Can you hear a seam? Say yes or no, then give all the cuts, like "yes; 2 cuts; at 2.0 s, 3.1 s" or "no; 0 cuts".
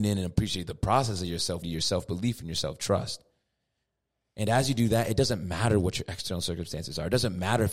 yes; 1 cut; at 1.6 s